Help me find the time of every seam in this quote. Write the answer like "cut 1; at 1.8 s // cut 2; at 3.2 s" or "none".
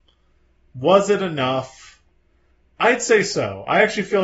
none